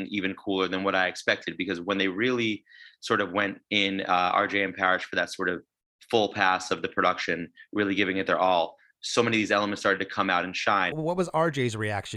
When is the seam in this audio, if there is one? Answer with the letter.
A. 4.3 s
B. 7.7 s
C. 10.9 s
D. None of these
C